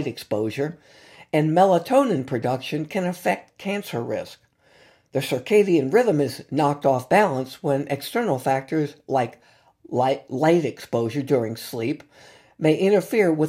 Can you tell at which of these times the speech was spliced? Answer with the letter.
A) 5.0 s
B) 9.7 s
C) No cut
C